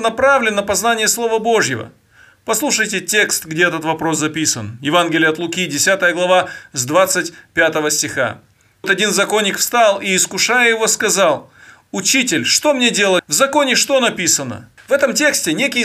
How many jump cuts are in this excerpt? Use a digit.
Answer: 3